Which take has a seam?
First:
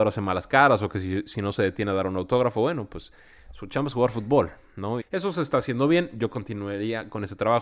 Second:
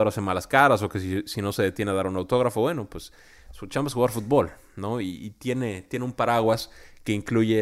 first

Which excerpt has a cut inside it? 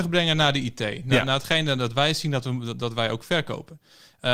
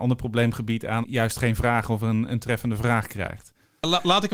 second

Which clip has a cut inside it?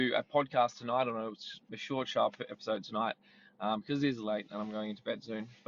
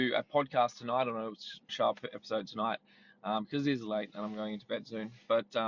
second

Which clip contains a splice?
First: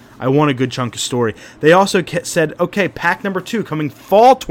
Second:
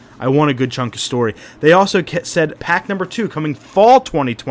second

